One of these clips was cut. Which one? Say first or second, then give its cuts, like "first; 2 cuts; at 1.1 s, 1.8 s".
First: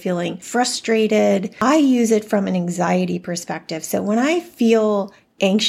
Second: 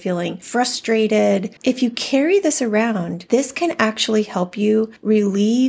second; 1 cut; at 1.6 s